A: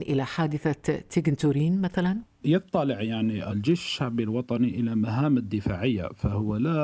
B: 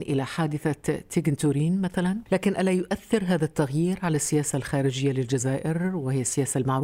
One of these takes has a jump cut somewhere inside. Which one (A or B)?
B